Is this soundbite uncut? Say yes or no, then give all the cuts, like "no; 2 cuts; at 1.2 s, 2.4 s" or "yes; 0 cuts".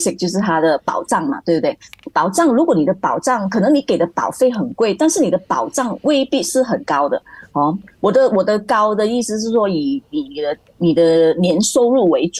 yes; 0 cuts